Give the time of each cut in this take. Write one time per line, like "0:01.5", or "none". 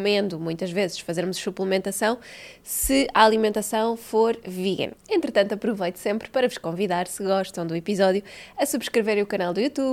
0:05.0